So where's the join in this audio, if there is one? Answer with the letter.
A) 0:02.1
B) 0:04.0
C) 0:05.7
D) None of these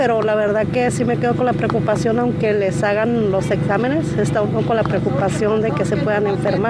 D